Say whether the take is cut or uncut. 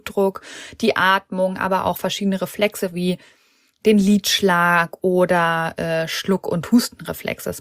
uncut